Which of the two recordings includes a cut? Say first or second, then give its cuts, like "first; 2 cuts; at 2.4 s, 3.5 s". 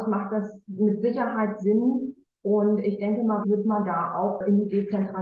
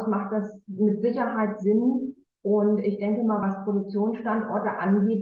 first; 1 cut; at 3.4 s